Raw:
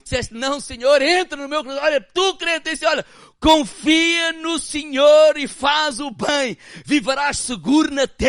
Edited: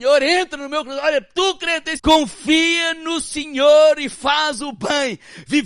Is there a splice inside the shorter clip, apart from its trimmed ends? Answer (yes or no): yes